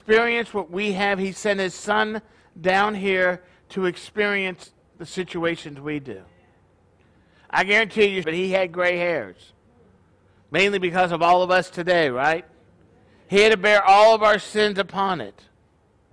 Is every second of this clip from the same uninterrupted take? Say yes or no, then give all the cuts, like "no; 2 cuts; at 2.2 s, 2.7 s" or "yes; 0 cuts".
no; 1 cut; at 8.2 s